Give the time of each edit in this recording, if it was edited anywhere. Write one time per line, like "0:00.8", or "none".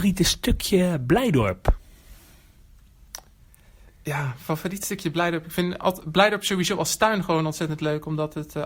none